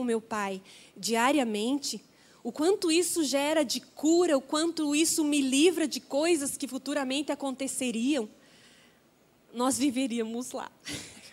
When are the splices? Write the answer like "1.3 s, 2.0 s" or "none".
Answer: none